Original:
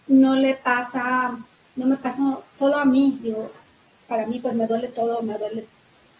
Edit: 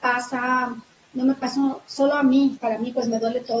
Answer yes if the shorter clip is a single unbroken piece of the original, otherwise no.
no